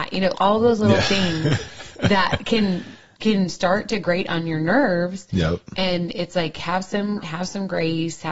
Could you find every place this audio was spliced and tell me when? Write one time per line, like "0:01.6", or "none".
none

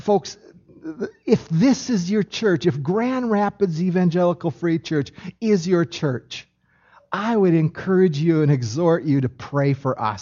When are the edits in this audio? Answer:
none

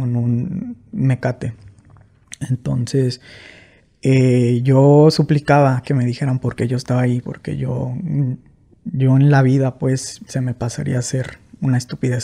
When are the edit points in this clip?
0:07.2

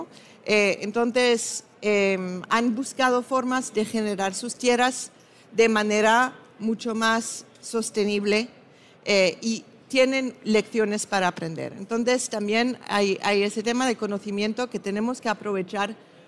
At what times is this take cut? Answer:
none

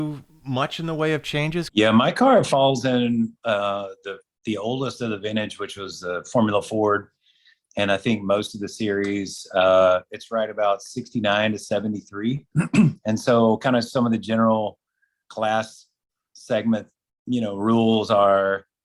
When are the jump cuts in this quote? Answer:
0:01.7
0:12.5

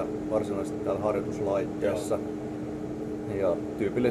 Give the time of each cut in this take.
none

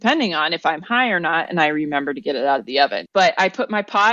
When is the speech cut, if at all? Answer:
0:03.1

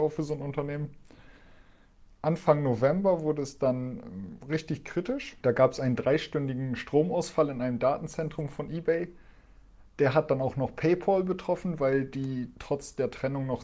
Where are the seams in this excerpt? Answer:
none

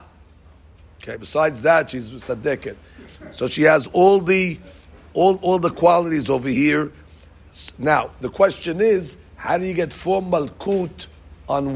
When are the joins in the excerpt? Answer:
none

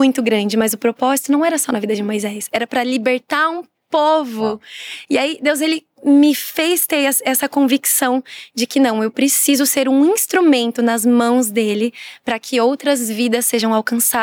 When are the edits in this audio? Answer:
none

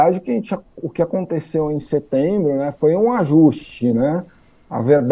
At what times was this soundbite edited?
none

